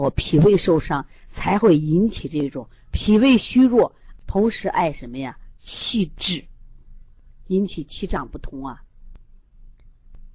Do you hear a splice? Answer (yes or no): yes